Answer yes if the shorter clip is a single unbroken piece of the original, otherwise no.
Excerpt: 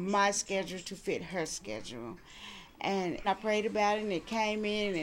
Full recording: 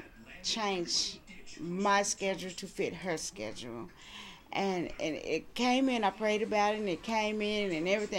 no